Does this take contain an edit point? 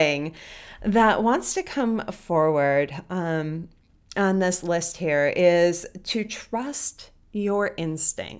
no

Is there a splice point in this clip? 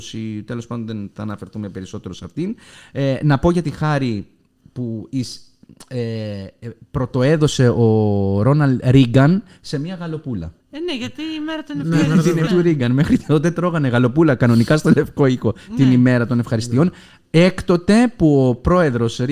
yes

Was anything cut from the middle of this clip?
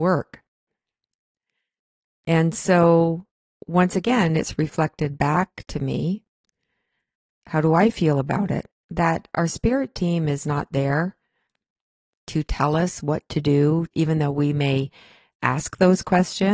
yes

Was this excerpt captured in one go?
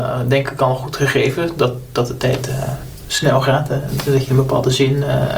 yes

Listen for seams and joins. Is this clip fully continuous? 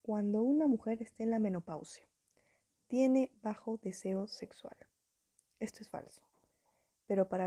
yes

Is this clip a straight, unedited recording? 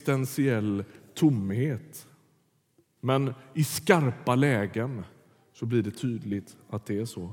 no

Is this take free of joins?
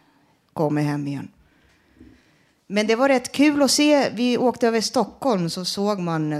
yes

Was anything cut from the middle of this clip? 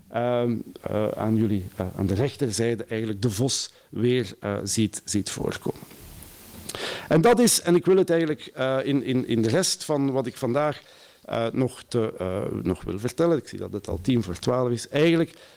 no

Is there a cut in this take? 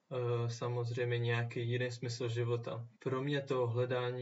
yes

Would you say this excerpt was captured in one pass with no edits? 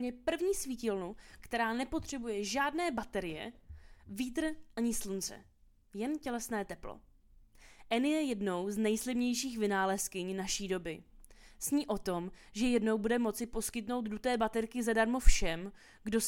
yes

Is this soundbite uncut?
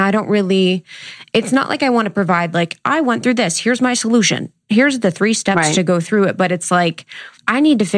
yes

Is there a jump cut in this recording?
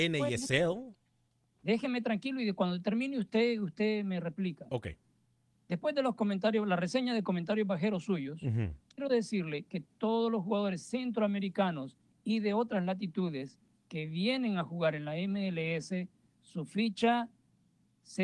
no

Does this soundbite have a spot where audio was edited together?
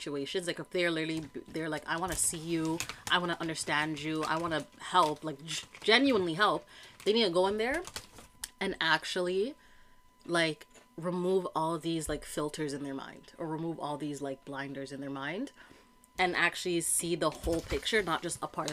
no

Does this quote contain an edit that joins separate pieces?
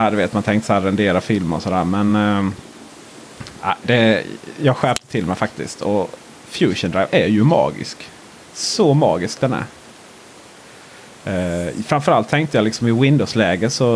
no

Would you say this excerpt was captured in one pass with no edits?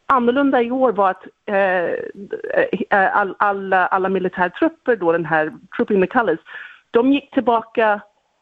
yes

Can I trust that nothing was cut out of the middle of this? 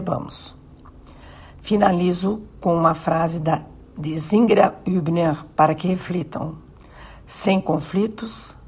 yes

